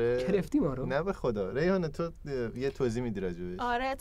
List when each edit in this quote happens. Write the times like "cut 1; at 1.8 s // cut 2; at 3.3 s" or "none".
none